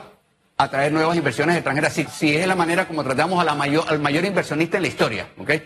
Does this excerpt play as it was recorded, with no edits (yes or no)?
no